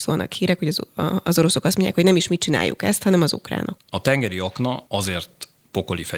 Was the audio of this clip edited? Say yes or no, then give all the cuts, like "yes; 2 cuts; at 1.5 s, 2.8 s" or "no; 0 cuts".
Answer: yes; 2 cuts; at 3.8 s, 4.9 s